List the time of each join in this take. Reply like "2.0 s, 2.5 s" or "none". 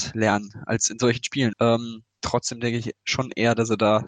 1.5 s

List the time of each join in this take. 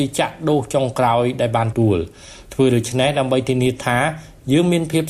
1.7 s

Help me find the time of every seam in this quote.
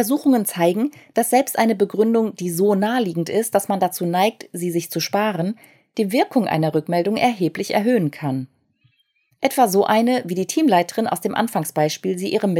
none

